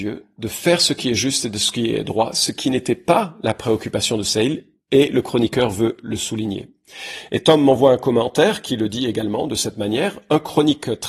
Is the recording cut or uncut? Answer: uncut